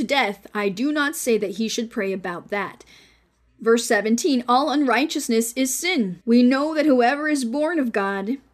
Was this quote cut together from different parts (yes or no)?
yes